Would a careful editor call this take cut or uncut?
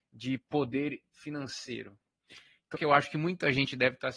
cut